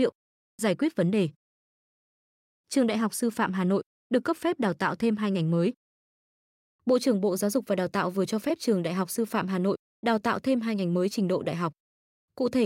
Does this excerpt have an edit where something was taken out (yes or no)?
no